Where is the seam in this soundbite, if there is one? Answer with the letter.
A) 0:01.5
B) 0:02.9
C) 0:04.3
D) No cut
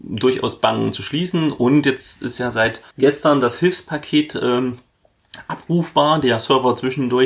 B